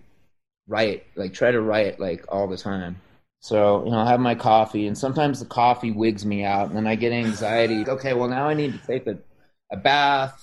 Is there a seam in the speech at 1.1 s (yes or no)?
no